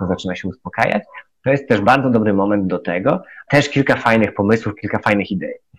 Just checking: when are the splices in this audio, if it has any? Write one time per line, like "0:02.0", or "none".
0:03.5